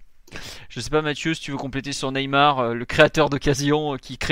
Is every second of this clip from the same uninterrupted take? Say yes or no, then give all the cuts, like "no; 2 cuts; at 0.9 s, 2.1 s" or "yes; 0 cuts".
yes; 0 cuts